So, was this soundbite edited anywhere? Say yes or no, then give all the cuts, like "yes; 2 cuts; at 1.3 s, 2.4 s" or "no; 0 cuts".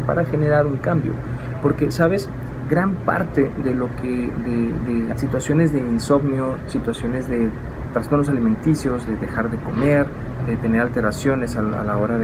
yes; 1 cut; at 5.1 s